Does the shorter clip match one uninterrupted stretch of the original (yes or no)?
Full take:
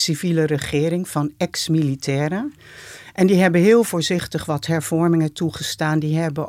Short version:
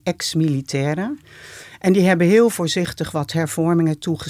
yes